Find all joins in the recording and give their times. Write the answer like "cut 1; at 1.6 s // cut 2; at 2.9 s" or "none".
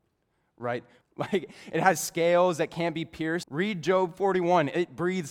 cut 1; at 1.0 s // cut 2; at 3.4 s